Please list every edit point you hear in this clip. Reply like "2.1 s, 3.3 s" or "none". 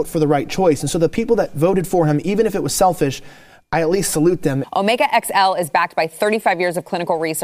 4.6 s